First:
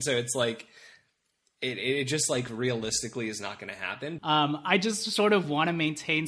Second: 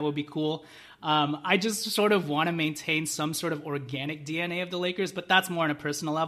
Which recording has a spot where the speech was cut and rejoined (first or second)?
first